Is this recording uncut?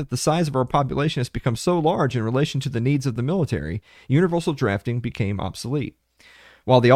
yes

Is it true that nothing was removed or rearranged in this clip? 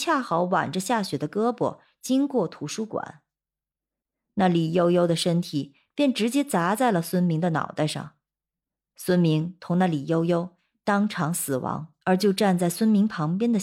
no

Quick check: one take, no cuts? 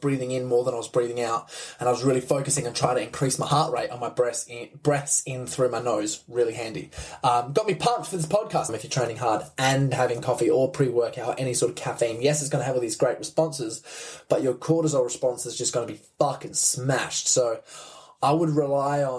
no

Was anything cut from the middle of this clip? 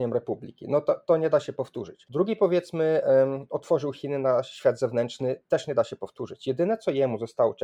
no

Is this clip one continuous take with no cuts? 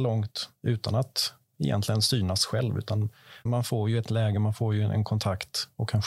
no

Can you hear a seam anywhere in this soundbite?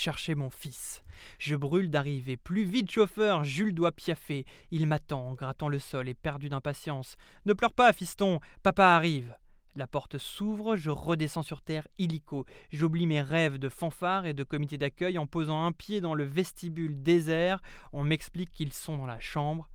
yes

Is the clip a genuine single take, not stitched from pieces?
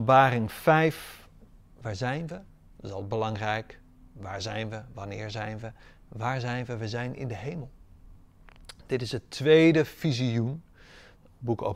yes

